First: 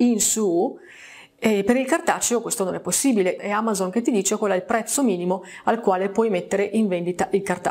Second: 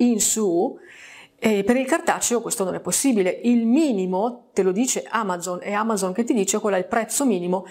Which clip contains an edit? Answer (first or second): first